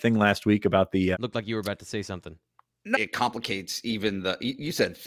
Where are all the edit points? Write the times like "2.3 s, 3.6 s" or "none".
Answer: 1.1 s, 2.9 s